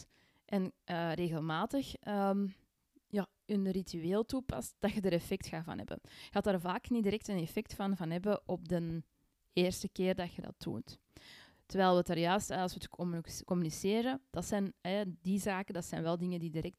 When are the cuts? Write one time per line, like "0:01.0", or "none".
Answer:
none